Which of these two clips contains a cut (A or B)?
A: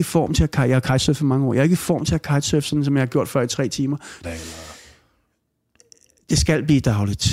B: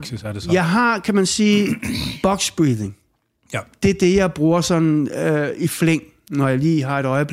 A